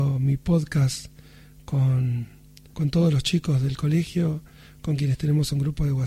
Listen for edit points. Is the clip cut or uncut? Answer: cut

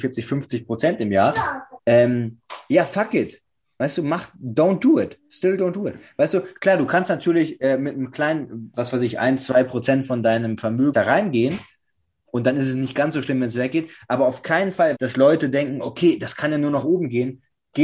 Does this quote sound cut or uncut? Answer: cut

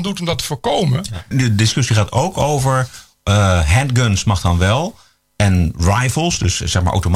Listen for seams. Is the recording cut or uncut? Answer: cut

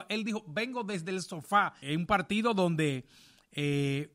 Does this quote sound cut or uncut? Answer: cut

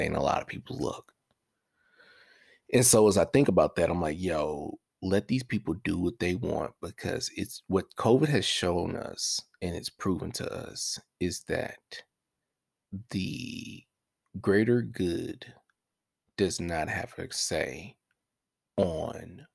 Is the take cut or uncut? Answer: uncut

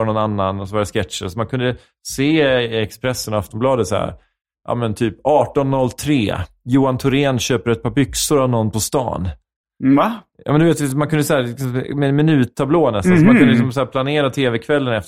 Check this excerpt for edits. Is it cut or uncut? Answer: uncut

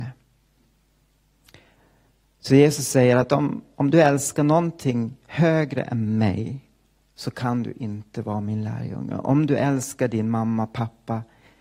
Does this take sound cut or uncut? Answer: uncut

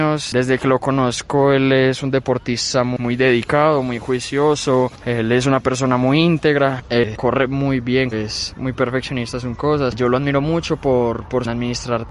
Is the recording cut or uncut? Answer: cut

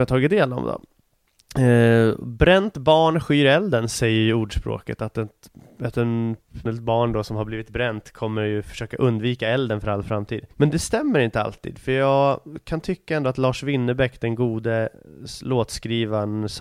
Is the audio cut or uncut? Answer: cut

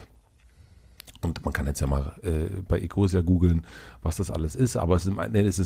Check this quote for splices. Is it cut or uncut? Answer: uncut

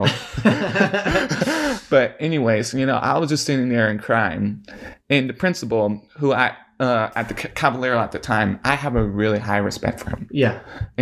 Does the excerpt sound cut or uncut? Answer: uncut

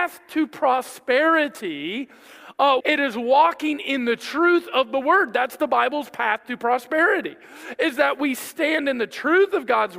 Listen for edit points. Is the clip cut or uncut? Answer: cut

